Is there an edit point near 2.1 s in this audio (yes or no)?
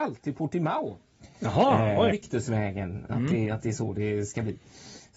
yes